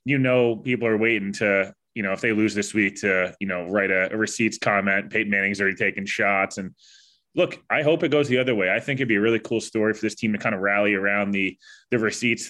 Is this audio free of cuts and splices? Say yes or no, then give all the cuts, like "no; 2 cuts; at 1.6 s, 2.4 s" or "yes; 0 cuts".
yes; 0 cuts